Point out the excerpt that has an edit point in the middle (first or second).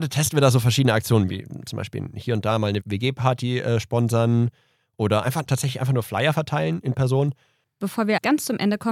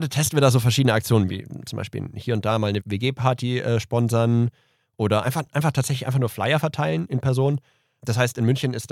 first